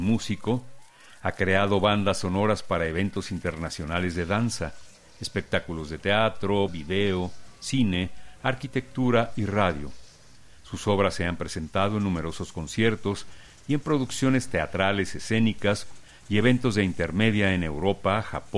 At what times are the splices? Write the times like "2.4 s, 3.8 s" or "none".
6.7 s